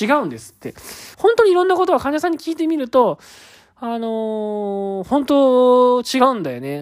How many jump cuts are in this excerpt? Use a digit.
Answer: 1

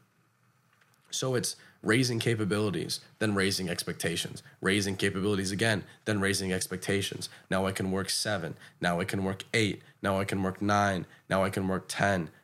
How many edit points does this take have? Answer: 1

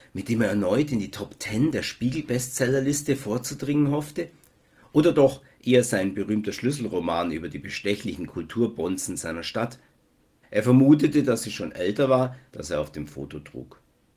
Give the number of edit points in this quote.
2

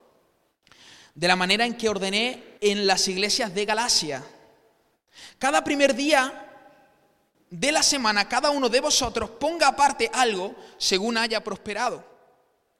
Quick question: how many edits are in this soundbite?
1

